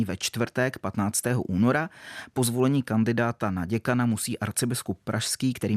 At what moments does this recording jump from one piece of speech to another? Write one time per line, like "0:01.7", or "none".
none